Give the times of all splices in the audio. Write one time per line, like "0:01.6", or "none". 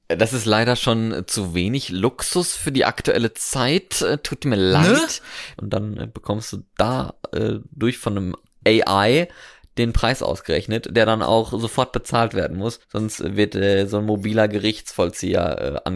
0:05.5
0:12.8